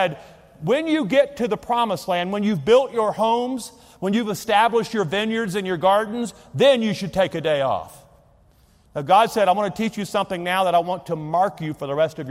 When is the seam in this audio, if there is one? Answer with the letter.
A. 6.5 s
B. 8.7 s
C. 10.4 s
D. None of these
D